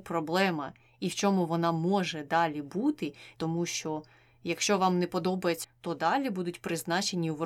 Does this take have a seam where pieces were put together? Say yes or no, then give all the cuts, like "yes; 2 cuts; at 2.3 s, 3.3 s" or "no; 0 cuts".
yes; 2 cuts; at 3.4 s, 5.6 s